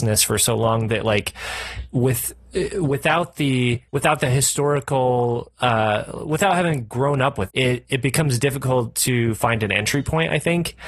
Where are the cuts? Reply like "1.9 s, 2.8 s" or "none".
3.9 s, 7.5 s